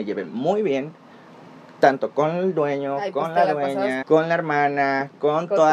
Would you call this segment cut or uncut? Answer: cut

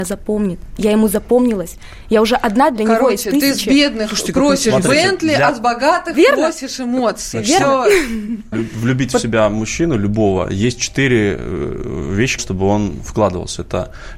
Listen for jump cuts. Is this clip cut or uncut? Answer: cut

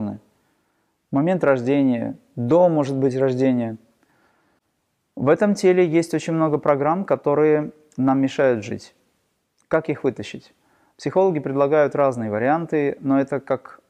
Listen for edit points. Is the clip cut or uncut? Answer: uncut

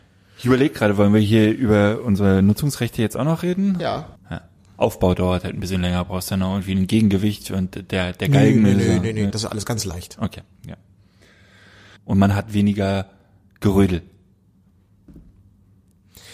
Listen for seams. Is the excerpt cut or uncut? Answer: cut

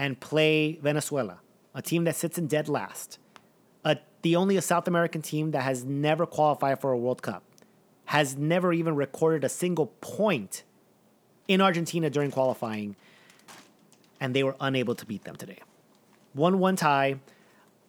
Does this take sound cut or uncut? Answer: uncut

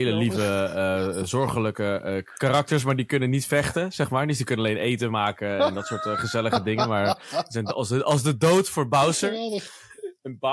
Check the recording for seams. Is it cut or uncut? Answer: uncut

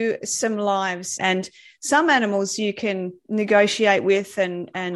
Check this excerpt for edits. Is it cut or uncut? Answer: cut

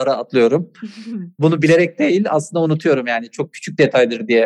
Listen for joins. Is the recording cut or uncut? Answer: uncut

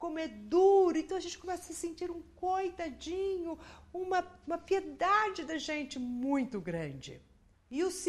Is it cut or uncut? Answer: uncut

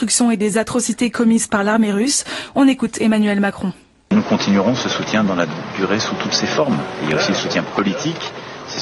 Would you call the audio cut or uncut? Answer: uncut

